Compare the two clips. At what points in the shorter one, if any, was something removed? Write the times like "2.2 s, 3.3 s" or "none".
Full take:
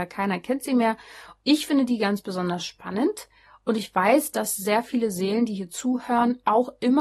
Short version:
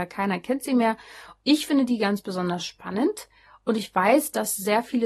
none